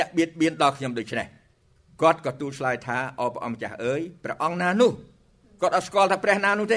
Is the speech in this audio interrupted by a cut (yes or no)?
no